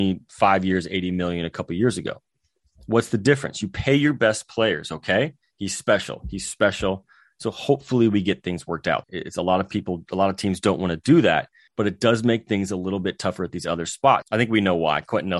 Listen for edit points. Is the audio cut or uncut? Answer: cut